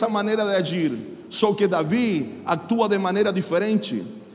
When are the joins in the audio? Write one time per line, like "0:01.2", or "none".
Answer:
none